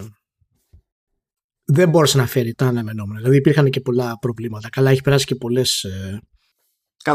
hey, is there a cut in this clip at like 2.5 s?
yes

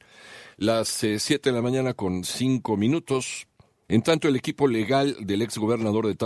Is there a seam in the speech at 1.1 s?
no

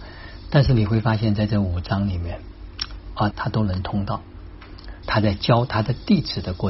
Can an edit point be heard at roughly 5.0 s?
yes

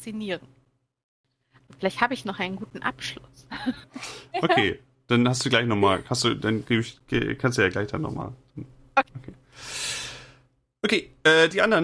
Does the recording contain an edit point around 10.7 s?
no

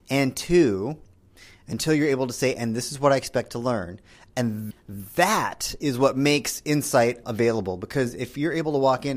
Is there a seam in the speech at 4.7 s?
yes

